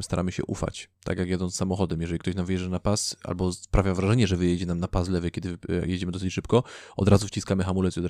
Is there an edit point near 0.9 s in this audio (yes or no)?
yes